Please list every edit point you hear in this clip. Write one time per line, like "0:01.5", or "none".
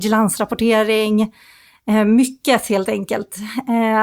none